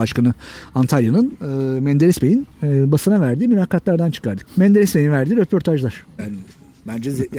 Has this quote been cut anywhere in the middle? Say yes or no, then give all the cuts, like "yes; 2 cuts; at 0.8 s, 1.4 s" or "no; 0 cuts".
yes; 2 cuts; at 4.5 s, 6.2 s